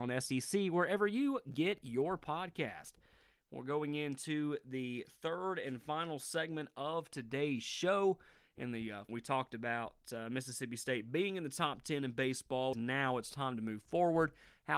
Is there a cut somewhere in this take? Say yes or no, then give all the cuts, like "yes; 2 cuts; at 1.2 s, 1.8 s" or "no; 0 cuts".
yes; 2 cuts; at 9.1 s, 12.7 s